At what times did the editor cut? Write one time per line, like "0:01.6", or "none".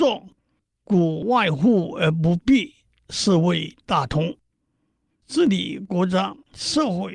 none

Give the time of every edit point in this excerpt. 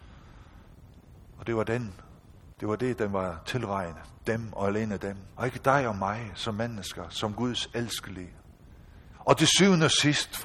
0:05.3
0:09.1

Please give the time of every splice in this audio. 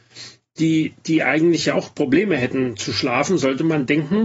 none

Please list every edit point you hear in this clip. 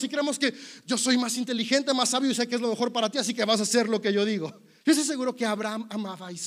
0:04.8

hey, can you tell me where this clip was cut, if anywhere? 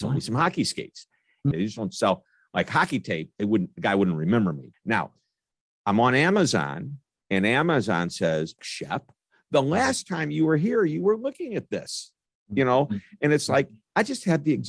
0:01.5
0:04.7
0:08.6

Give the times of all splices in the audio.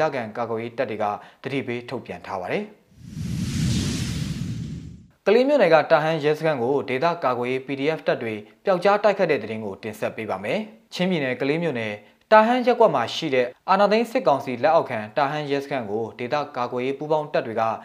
0:10.9

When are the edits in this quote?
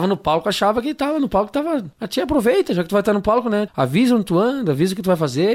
0:01.9
0:03.7

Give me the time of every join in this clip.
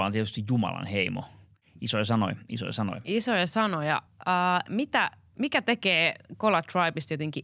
none

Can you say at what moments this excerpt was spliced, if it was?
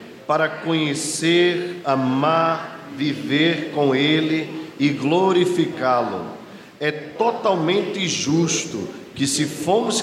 none

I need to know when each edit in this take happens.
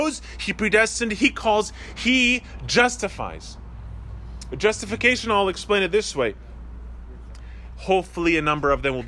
0:07.7

